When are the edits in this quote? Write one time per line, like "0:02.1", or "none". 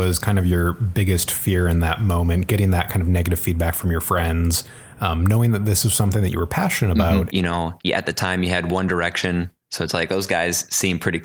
0:07.3